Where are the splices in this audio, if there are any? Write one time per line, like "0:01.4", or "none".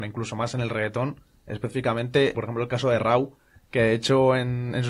0:02.3